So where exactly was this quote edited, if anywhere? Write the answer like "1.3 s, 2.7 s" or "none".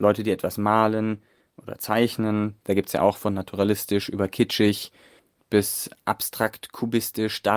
1.5 s